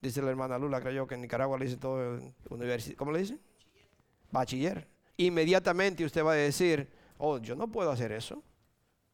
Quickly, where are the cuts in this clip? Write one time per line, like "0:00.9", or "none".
0:02.4
0:05.1